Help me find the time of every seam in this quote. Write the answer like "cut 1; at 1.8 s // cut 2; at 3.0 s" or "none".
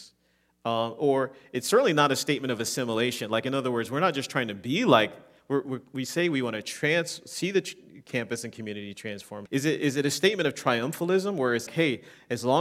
cut 1; at 9.5 s // cut 2; at 11.7 s